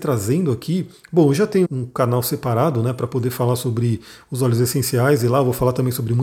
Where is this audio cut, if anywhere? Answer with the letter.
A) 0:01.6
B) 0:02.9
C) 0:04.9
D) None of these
A